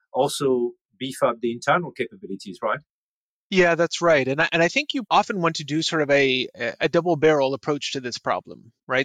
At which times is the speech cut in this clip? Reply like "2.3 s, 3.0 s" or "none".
none